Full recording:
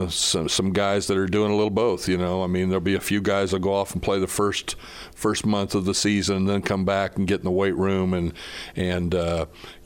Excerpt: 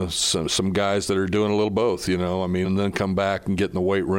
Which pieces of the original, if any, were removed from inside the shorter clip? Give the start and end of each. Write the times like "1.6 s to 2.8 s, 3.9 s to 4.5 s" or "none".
2.6 s to 6.3 s